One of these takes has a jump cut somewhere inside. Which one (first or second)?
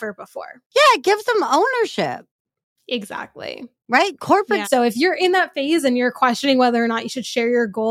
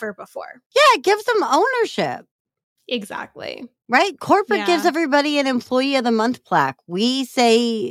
first